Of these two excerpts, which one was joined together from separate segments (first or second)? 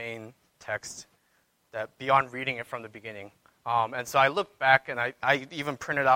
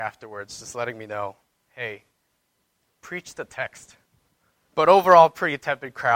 second